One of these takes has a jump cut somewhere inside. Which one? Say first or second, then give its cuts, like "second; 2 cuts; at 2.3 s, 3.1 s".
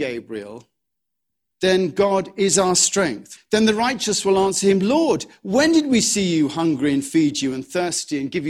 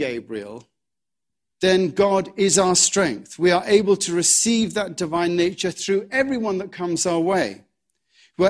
first; 1 cut; at 3.4 s